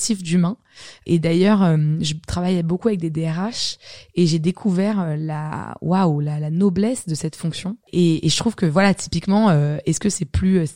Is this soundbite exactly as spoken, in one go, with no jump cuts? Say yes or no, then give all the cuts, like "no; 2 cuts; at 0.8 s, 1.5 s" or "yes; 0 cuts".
no; 1 cut; at 7.8 s